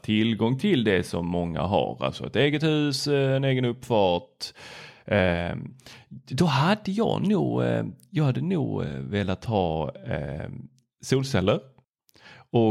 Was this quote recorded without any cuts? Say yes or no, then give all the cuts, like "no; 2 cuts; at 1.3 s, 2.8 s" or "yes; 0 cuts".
yes; 0 cuts